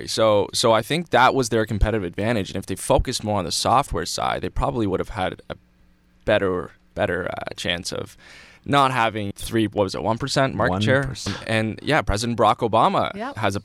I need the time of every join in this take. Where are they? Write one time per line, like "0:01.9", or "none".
0:09.3
0:11.3